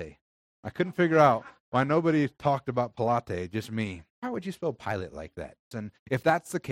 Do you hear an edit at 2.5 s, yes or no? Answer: no